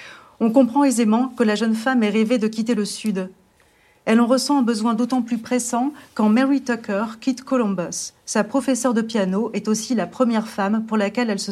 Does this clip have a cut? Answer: no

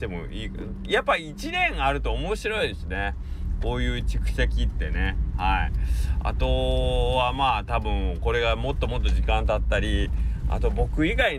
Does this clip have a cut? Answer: no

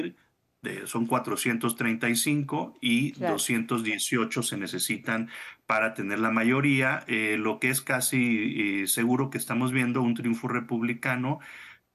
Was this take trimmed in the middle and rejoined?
no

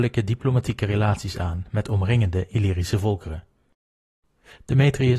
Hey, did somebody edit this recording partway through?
no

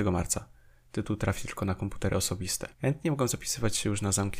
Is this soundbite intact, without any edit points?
no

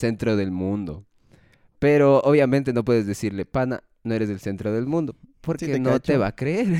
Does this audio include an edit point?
no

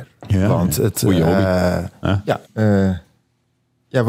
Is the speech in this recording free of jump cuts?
no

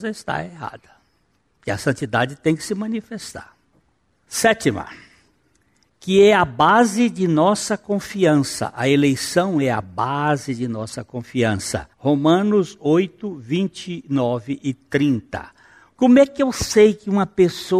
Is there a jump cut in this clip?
yes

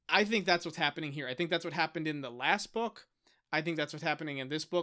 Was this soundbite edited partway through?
no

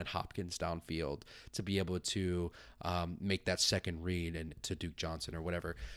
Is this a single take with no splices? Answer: no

